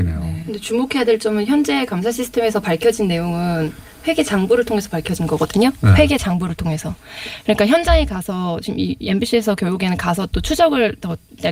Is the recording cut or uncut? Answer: uncut